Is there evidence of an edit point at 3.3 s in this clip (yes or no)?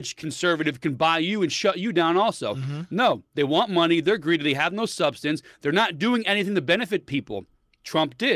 no